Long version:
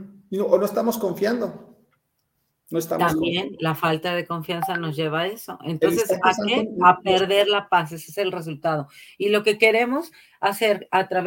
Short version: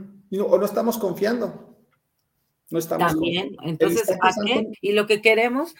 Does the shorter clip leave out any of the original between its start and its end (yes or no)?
yes